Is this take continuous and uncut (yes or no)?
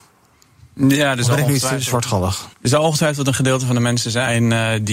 no